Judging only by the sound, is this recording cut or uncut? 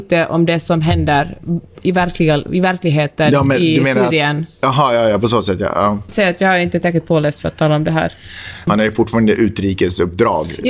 cut